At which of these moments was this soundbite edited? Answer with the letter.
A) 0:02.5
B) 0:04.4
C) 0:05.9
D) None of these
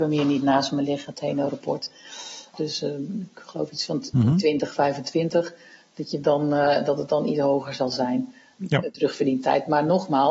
A